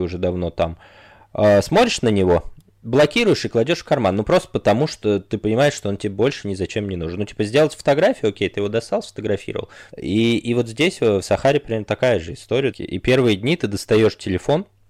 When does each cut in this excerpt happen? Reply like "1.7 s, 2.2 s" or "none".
9.9 s, 12.7 s